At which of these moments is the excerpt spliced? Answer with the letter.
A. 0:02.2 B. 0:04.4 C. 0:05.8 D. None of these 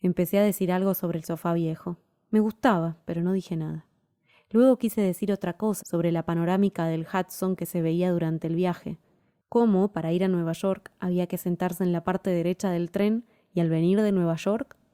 C